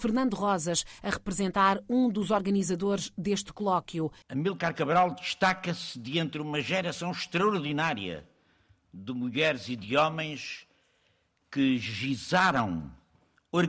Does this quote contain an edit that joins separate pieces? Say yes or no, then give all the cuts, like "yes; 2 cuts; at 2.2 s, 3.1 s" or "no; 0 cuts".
yes; 1 cut; at 4.2 s